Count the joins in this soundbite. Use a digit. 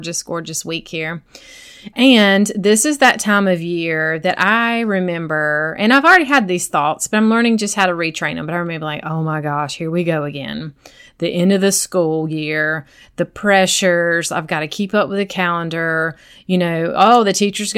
1